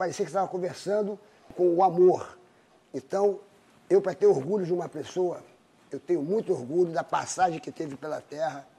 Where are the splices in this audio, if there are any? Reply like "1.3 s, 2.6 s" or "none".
5.9 s